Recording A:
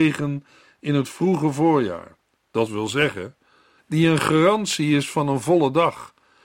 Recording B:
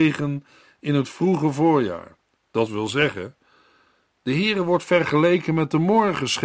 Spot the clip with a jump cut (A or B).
A